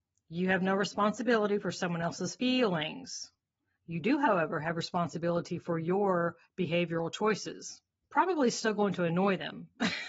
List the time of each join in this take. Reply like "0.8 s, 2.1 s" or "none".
8.0 s